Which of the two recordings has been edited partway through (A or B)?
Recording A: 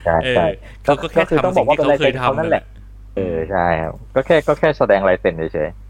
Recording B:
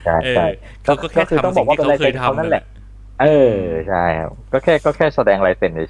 A